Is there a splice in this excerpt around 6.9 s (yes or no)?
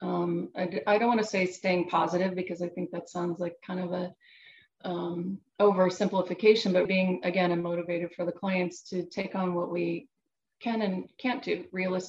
yes